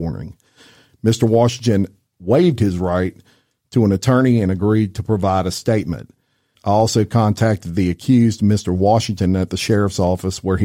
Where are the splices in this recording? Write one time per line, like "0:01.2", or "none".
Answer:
0:06.6